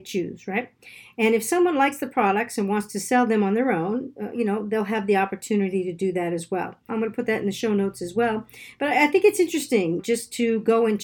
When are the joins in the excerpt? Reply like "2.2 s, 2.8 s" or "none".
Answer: 6.9 s, 10.0 s